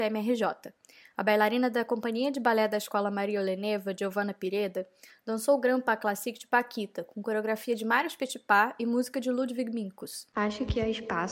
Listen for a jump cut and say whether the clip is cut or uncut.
cut